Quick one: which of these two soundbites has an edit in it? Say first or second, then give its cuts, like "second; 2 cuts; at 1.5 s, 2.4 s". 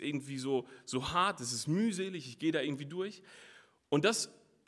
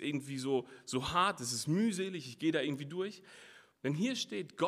second; 1 cut; at 3.7 s